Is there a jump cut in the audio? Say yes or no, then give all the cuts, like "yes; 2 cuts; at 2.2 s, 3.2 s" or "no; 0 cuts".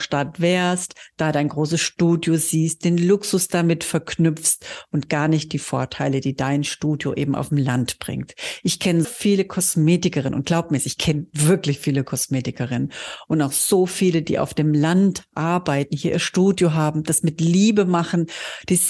yes; 1 cut; at 9.0 s